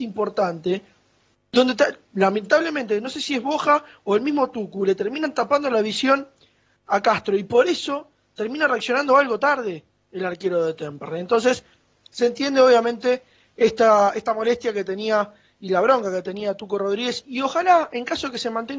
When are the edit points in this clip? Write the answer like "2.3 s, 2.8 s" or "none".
none